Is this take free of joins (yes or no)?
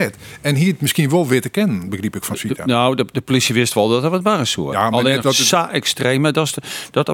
no